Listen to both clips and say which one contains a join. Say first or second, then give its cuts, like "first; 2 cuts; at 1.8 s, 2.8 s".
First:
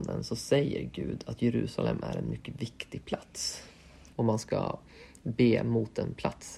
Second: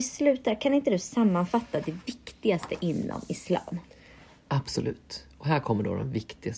first; 1 cut; at 4.1 s